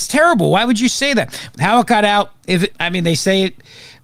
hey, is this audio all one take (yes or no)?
no